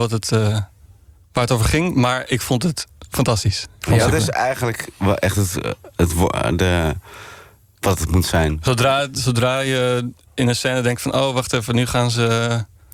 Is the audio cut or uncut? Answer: uncut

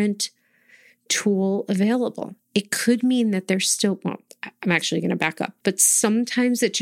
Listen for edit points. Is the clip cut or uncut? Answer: cut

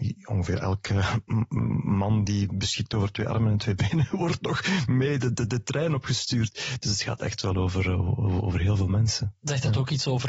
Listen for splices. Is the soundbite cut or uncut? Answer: uncut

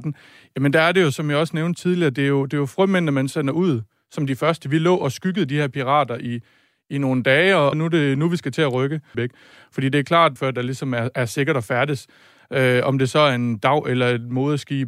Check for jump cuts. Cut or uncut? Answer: cut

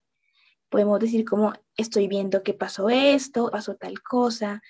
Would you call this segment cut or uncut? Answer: cut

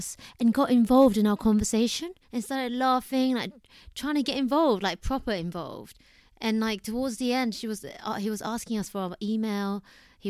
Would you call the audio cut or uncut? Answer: cut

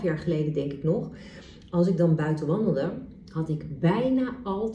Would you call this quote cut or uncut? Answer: uncut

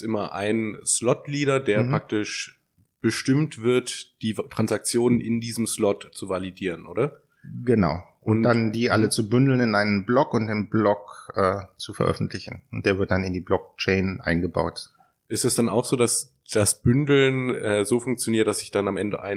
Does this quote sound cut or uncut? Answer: uncut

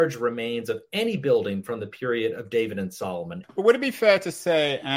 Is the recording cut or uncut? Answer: cut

